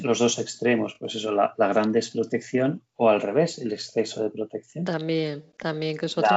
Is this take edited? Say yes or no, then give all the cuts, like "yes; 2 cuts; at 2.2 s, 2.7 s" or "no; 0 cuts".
no; 0 cuts